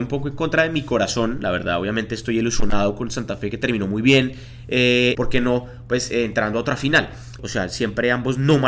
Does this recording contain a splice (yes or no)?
yes